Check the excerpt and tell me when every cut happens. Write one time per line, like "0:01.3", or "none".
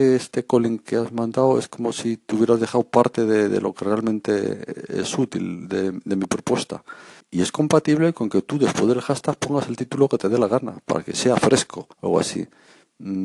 0:07.2
0:11.9